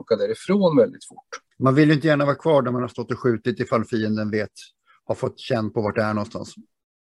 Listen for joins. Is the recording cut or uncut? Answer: cut